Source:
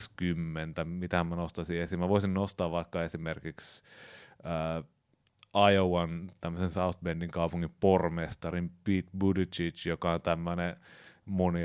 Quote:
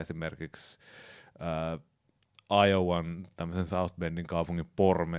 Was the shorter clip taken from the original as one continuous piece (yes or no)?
yes